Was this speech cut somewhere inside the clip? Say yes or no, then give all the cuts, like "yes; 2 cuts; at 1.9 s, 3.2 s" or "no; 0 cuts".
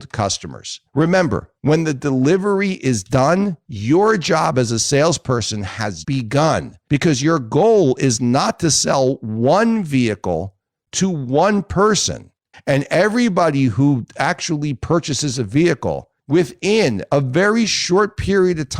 yes; 2 cuts; at 6.0 s, 12.5 s